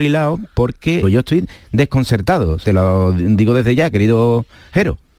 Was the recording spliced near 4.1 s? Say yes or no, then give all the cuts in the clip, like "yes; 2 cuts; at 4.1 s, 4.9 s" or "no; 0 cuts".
no; 2 cuts; at 1.0 s, 2.6 s